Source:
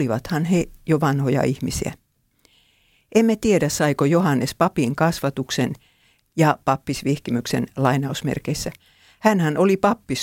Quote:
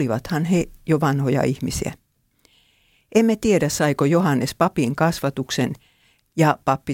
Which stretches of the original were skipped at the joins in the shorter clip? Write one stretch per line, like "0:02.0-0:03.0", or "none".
none

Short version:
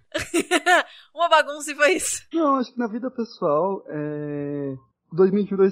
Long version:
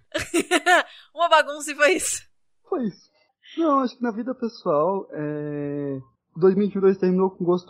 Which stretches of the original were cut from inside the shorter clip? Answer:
0:02.3-0:03.6

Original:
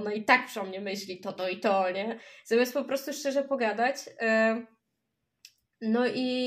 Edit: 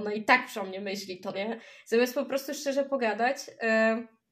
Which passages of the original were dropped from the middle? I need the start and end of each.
0:01.3-0:01.9

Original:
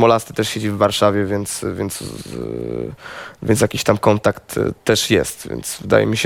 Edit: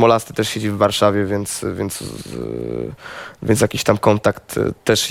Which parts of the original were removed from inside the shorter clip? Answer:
none

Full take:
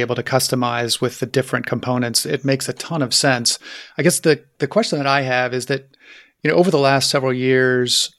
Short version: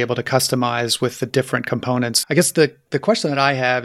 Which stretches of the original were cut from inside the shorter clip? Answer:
0:02.2-0:03.9

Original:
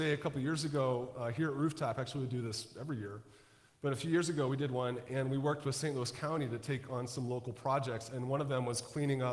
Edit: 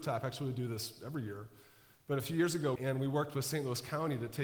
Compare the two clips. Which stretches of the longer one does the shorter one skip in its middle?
0:04.5-0:05.1

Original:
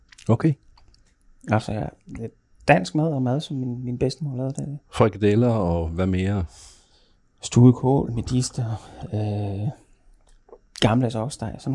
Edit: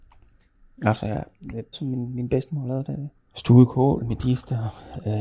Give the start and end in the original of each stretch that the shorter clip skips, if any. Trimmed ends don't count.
0:02.4-0:03.4
0:04.8-0:07.2

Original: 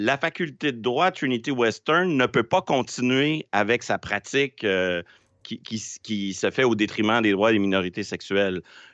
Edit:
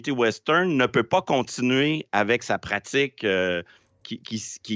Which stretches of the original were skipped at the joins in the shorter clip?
none

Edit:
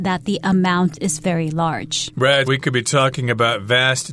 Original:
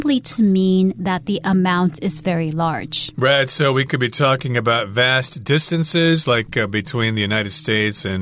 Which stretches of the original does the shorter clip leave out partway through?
0:03.5-0:03.7

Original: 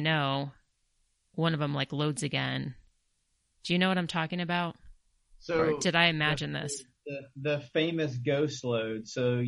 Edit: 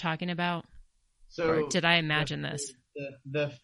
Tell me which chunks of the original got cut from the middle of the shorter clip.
none

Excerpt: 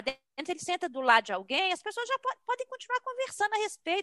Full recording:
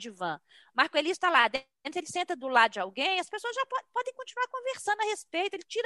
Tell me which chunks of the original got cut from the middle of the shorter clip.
none

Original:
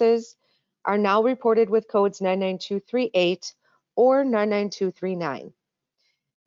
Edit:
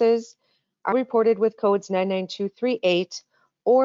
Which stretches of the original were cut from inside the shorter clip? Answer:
0:00.9-0:01.2

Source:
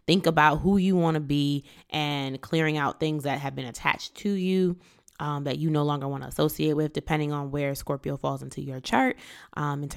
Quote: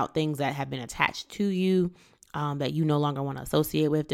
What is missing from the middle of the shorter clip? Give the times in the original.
none

